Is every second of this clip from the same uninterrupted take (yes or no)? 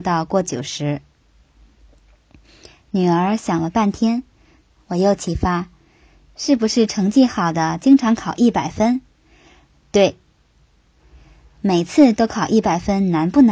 yes